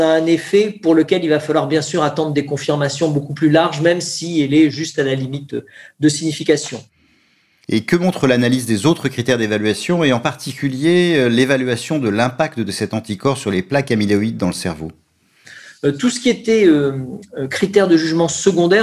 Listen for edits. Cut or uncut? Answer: uncut